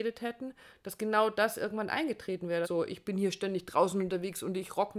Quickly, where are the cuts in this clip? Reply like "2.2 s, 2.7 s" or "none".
2.6 s